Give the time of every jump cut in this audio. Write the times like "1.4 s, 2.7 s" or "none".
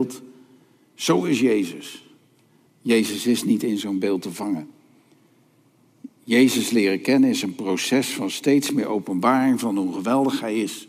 2.7 s